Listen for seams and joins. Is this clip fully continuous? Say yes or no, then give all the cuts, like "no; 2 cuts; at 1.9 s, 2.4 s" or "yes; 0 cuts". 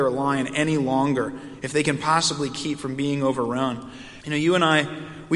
no; 1 cut; at 4.2 s